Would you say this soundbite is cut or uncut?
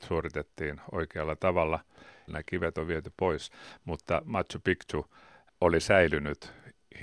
cut